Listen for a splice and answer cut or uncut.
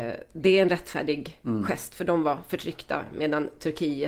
uncut